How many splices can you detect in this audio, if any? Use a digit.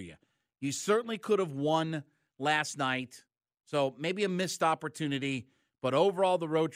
0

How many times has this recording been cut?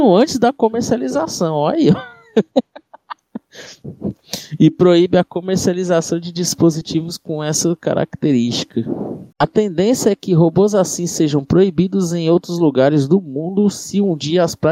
1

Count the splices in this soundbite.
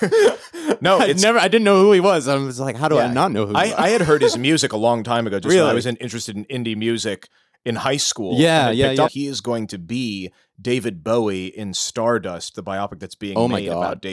1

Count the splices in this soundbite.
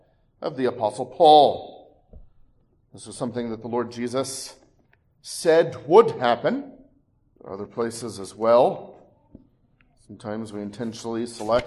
1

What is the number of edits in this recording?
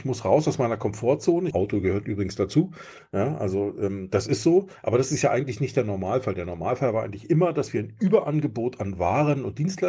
1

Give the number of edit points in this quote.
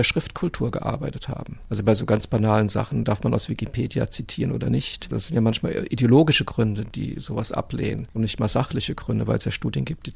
0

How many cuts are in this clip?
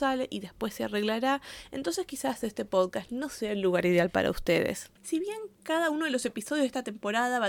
1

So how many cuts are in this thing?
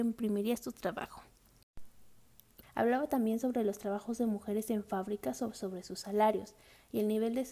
1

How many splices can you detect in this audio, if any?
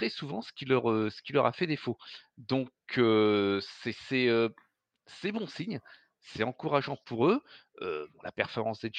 0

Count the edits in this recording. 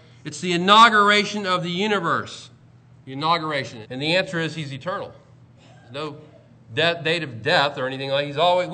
2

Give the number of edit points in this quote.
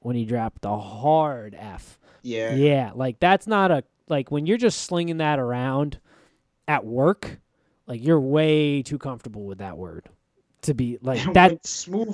1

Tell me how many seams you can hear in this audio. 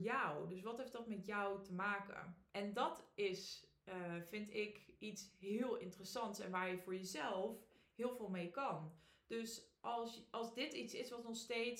1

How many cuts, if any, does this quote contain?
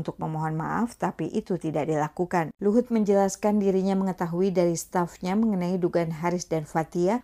1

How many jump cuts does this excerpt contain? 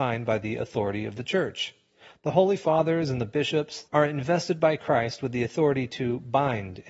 1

